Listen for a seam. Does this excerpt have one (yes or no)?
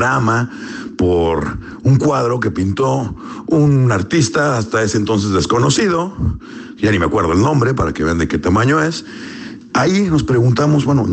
yes